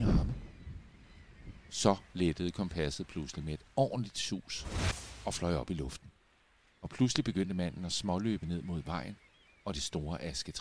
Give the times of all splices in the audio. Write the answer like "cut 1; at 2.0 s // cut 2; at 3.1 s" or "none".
cut 1; at 6.7 s